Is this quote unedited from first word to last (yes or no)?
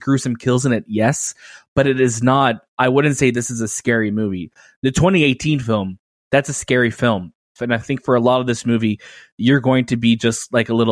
no